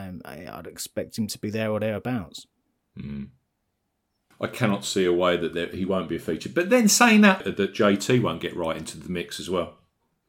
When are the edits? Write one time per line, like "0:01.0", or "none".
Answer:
0:04.3
0:07.4